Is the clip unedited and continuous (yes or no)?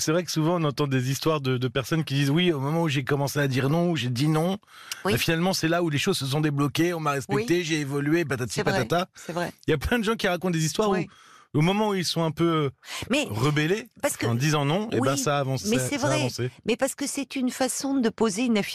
yes